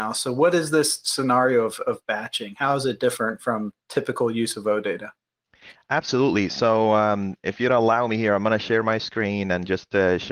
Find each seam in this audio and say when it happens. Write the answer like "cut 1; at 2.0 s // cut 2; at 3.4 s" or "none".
none